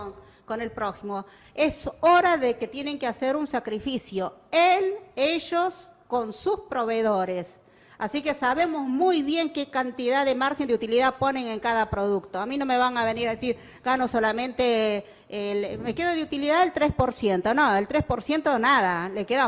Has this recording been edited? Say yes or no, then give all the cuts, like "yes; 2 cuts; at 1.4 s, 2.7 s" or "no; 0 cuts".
no; 0 cuts